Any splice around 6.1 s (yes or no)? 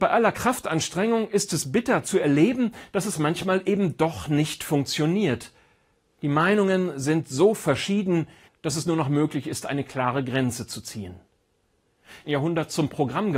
no